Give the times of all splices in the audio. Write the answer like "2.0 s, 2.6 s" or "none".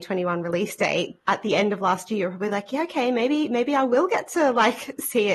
none